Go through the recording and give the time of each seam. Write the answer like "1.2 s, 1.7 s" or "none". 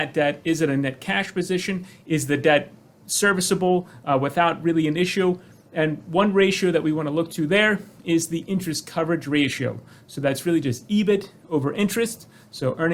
none